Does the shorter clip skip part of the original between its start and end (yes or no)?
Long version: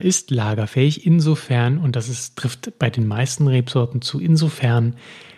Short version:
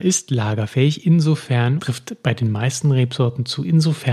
yes